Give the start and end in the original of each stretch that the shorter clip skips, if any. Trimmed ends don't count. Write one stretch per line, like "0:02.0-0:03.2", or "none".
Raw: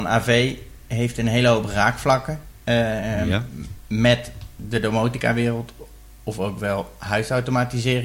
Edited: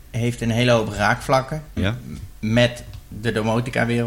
0:02.5-0:03.2

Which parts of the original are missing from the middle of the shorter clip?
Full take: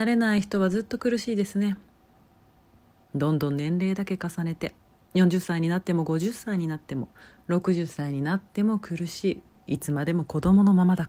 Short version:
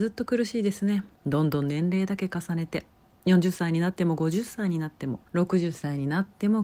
0:01.9-0:03.0
0:07.2-0:07.4

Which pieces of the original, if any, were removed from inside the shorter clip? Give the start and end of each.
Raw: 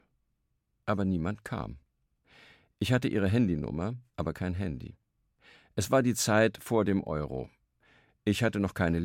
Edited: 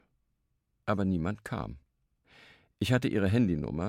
none

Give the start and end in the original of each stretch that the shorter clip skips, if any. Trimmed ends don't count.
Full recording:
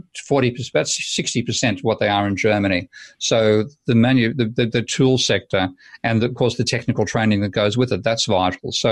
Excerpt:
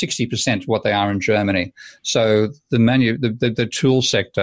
none

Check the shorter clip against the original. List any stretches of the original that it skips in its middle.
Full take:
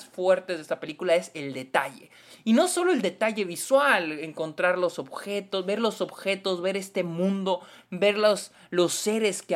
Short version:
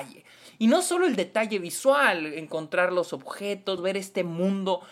0:05.6-0:06.6

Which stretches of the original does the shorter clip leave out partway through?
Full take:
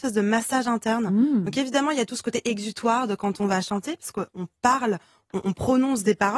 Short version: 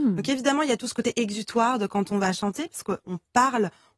none

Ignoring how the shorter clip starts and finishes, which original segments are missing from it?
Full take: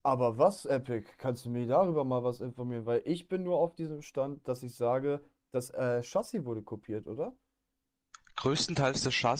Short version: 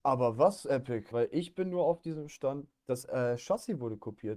0:01.1-0:02.8
0:04.4-0:05.3

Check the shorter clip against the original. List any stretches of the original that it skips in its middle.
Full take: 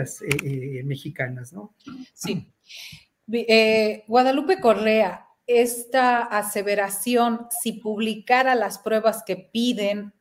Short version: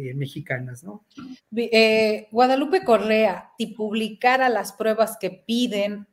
0:02.1-0:03.1
0:05.3-0:07.6

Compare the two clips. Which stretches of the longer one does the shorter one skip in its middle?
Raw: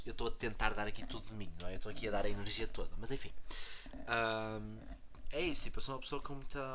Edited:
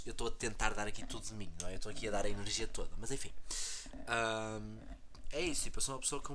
none

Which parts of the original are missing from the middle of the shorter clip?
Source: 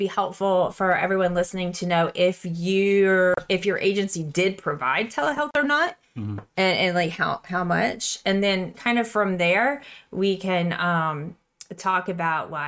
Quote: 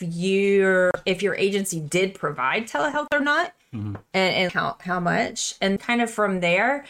0:06.9-0:07.1
0:08.4-0:08.7

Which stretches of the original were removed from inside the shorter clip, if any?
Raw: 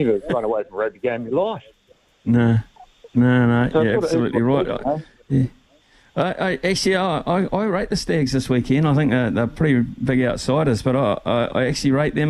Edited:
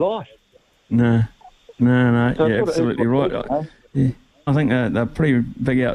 0:05.8-0:08.9

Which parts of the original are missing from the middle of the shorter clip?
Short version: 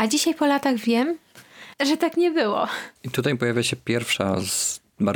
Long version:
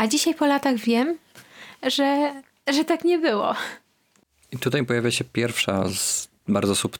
0:01.7-0:02.6
0:03.8-0:04.4

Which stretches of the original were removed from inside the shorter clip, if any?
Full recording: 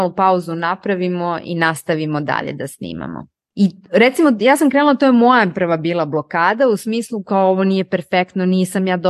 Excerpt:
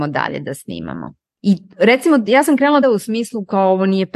0:05.0-0:06.6

